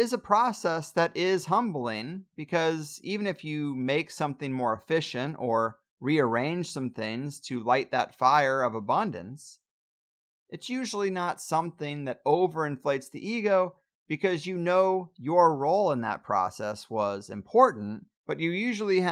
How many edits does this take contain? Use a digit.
1